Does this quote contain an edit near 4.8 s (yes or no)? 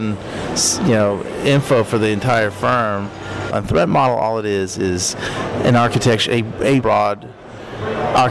no